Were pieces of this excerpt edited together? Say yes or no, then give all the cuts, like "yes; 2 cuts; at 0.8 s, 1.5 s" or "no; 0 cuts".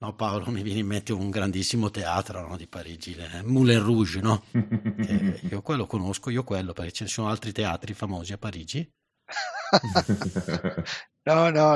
no; 0 cuts